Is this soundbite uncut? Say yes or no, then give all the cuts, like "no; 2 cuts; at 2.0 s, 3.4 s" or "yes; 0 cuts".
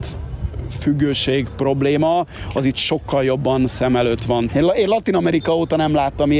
no; 1 cut; at 4.5 s